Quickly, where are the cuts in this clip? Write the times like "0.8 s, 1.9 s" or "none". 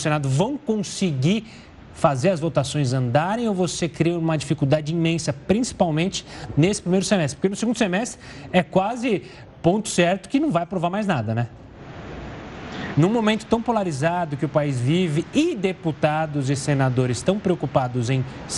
12.9 s